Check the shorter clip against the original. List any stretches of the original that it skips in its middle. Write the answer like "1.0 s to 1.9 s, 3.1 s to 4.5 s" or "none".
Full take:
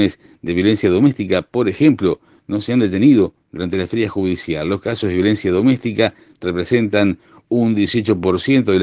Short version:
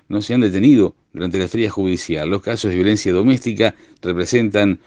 none

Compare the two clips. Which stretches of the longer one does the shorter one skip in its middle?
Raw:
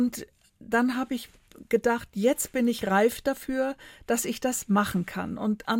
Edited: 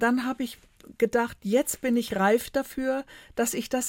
none

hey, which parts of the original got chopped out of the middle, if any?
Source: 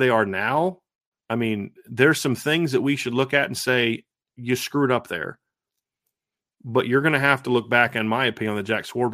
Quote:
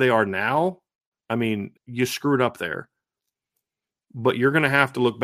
1.8 s to 4.3 s

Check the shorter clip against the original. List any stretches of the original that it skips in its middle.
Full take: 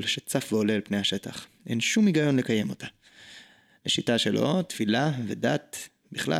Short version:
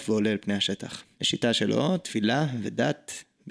1.6 s to 3.8 s

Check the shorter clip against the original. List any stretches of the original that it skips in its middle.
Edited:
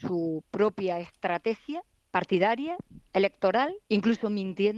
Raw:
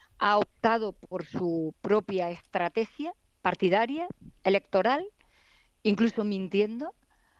5.2 s to 5.8 s

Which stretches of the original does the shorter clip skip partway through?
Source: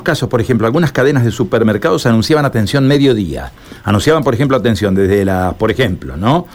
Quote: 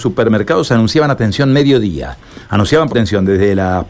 4.2 s to 4.6 s

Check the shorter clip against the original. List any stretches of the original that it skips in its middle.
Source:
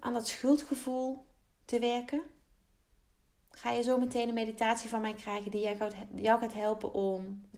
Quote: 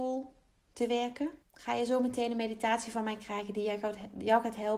2.3 s to 3.4 s

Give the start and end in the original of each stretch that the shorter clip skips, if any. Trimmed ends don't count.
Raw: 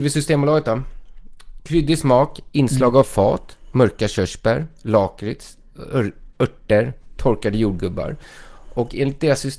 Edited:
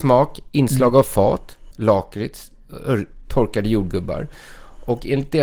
3.7 s to 4.8 s, 6.3 s to 7.1 s

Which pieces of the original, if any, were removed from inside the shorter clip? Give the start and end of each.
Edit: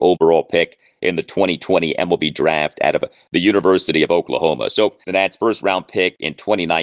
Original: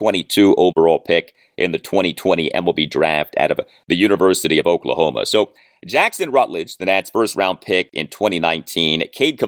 5.6 s to 6.8 s

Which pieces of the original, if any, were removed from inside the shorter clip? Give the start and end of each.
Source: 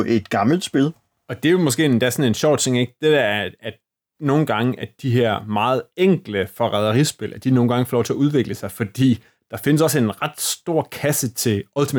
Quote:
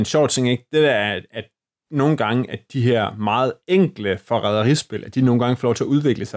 none

